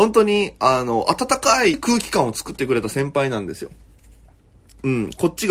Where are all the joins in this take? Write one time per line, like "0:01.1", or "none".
0:01.7